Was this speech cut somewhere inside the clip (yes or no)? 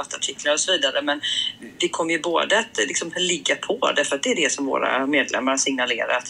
no